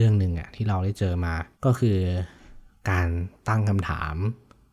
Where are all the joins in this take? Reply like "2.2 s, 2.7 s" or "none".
1.5 s